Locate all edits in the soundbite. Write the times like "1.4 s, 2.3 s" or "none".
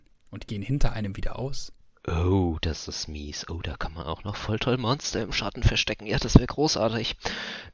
none